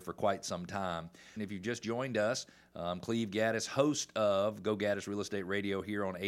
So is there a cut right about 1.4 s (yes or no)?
yes